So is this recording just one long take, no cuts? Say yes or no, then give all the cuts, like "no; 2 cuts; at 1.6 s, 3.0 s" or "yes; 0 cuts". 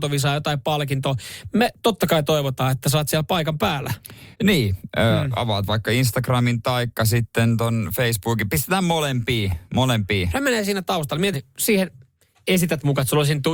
no; 2 cuts; at 4.3 s, 11.3 s